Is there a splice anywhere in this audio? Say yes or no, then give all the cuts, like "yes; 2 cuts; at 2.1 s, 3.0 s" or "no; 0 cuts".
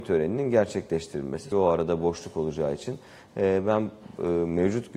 yes; 1 cut; at 1.5 s